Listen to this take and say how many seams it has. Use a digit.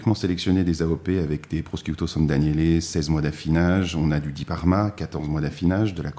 0